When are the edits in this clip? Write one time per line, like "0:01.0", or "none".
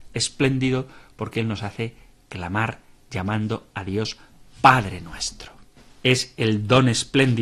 none

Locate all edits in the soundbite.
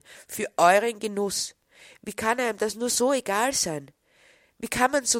none

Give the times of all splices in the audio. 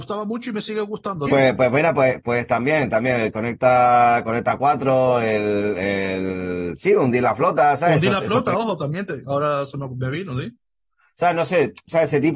0:01.3

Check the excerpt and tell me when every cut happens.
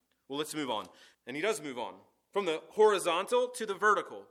0:01.1

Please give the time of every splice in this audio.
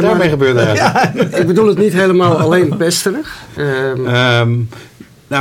0:03.6

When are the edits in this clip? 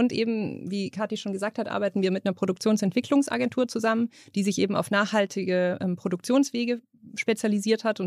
none

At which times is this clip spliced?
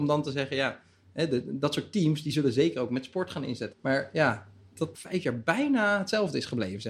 0:03.7
0:04.9

